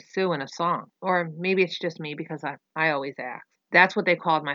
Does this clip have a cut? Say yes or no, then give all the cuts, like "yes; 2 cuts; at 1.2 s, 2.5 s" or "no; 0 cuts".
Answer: yes; 2 cuts; at 1.0 s, 3.5 s